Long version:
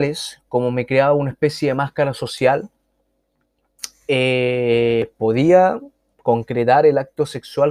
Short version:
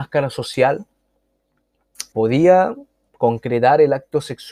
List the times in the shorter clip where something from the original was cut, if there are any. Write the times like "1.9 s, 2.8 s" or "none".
2.1 s